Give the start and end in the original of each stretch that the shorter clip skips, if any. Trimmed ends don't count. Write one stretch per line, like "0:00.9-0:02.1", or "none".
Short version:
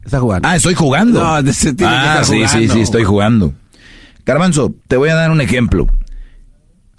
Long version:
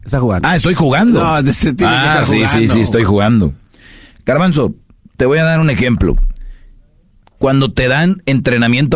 0:04.8-0:05.1